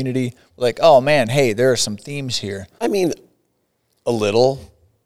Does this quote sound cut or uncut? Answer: cut